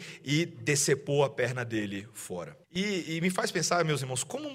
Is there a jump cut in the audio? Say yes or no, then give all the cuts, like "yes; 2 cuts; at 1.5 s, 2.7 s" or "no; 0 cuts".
yes; 1 cut; at 2.6 s